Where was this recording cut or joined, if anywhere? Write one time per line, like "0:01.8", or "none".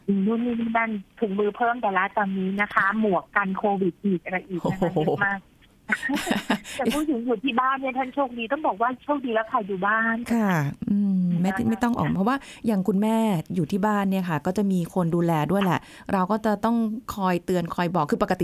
0:11.4